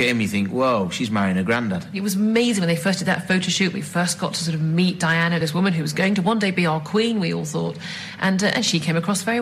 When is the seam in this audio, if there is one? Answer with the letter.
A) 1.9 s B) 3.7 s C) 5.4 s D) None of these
D